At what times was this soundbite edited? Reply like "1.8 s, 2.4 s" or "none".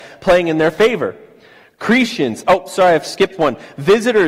none